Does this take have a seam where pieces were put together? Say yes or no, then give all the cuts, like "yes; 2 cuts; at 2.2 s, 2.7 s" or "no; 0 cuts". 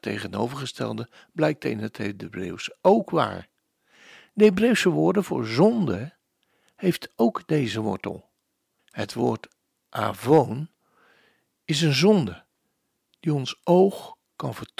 yes; 1 cut; at 8.8 s